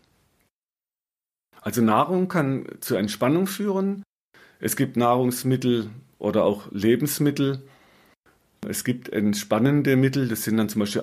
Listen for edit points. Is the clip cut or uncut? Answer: uncut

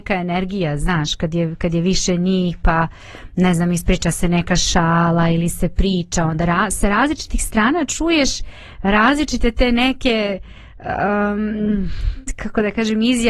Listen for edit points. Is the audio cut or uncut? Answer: uncut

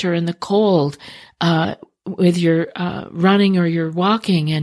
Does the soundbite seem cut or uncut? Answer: uncut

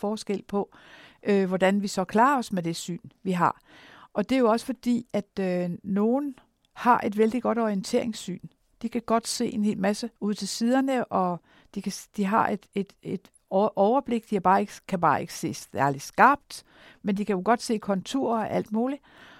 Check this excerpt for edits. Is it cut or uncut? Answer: cut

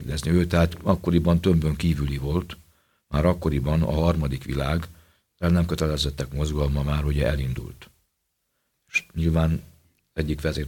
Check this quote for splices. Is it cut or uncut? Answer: uncut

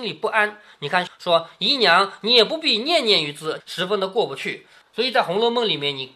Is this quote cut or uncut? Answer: cut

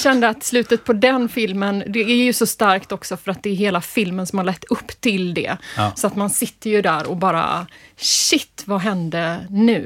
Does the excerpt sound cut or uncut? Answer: cut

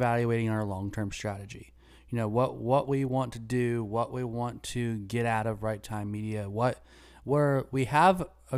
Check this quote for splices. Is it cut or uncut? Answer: uncut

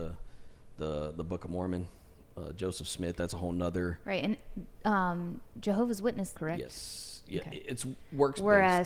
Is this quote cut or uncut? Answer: cut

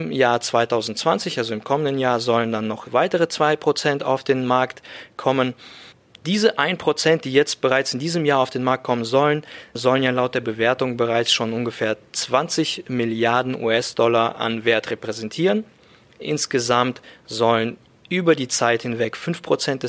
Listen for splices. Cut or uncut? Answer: uncut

